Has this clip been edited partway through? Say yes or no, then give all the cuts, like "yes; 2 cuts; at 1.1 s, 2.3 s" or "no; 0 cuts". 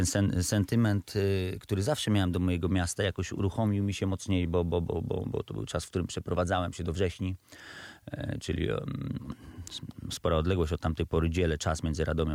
no; 0 cuts